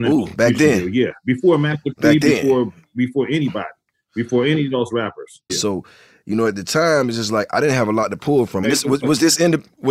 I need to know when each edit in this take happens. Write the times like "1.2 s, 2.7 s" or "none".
5.5 s, 8.6 s